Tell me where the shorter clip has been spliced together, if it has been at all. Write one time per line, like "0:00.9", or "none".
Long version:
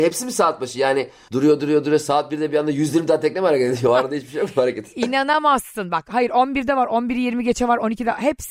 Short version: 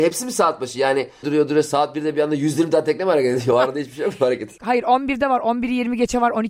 0:01.2
0:04.6